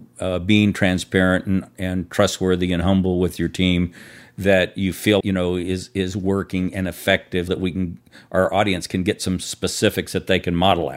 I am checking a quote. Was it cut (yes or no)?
yes